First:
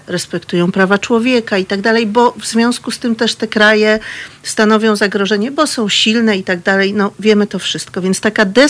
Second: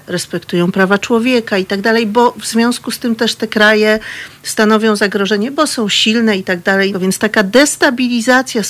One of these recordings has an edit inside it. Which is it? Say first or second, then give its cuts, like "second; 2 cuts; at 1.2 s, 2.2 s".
second; 1 cut; at 6.9 s